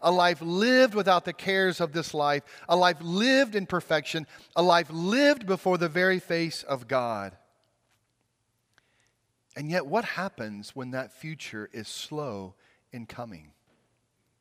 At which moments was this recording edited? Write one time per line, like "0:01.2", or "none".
none